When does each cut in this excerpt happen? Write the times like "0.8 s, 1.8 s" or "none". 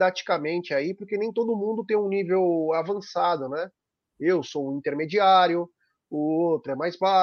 none